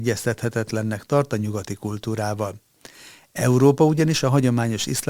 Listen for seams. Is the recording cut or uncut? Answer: uncut